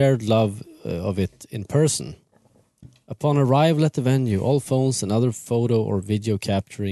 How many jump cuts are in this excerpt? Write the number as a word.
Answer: zero